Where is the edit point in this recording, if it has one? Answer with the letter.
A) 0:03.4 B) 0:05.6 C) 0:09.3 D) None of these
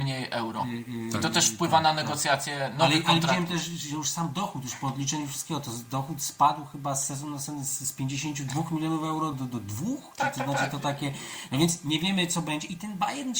C